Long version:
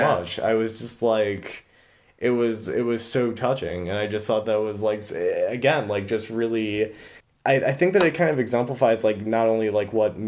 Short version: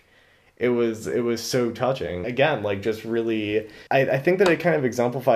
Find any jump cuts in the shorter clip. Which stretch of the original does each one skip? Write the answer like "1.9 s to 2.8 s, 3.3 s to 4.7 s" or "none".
3.9 s to 5.5 s, 7.1 s to 7.4 s

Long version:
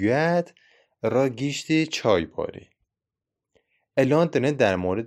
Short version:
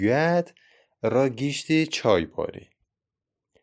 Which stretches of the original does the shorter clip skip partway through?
none

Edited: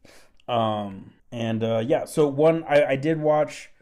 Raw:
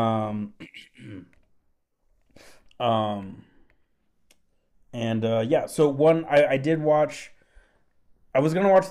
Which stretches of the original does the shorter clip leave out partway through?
3.5 s to 4.8 s

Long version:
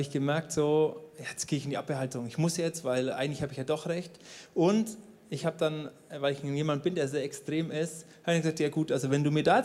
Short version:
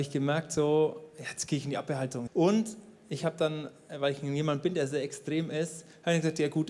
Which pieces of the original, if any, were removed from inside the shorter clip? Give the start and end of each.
2.3 s to 4.5 s

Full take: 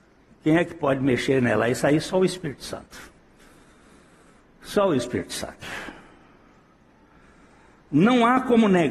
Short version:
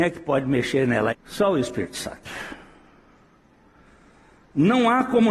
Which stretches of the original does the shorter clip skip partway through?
1.7 s to 4.5 s

